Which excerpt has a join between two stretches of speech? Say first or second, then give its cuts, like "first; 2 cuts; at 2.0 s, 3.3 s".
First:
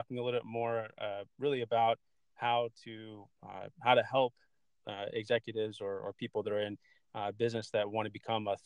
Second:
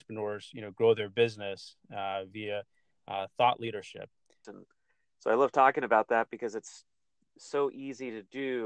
second; 1 cut; at 4.4 s